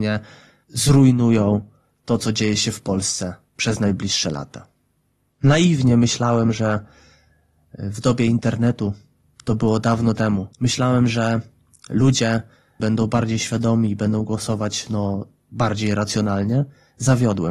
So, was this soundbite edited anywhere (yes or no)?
yes